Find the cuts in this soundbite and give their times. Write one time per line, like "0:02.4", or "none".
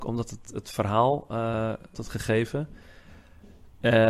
0:01.9